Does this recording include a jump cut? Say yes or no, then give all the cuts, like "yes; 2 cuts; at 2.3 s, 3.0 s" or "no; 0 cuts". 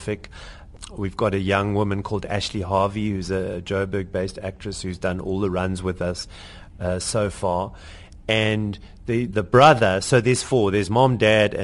no; 0 cuts